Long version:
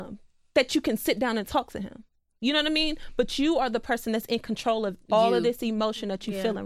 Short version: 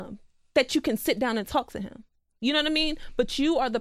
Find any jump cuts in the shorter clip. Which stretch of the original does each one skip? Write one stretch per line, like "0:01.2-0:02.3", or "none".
none